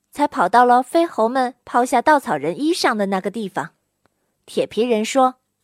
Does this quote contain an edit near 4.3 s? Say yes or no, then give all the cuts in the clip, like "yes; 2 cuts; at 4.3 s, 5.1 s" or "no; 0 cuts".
yes; 1 cut; at 4.3 s